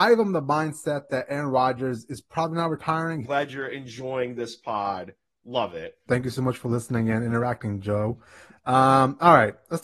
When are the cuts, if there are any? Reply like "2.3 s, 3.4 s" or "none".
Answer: 3.2 s, 6.1 s